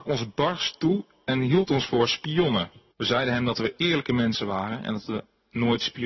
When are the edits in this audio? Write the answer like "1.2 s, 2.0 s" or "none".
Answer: 2.9 s